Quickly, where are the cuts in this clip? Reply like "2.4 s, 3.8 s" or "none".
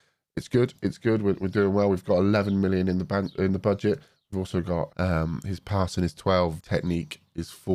4.9 s, 6.6 s